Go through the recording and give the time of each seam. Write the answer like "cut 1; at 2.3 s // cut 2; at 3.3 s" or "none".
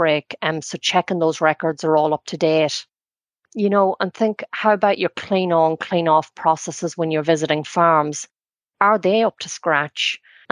none